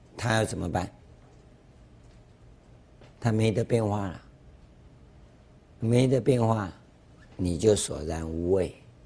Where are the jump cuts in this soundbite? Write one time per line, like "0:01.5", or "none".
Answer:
none